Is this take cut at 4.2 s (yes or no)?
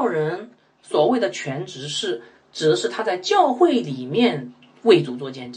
no